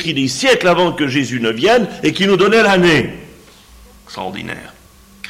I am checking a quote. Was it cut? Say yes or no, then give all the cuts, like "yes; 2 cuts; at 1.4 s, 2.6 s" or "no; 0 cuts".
no; 0 cuts